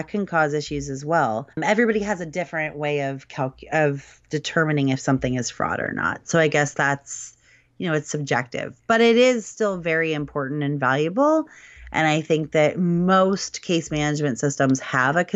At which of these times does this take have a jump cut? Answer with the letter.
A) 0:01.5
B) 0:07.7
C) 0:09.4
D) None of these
A